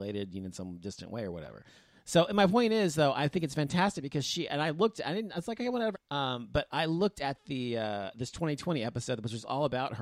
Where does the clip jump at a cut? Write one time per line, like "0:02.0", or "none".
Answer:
0:05.9